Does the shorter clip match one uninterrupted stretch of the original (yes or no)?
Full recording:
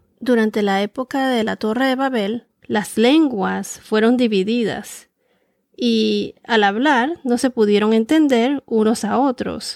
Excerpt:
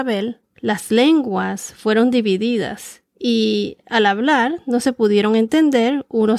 no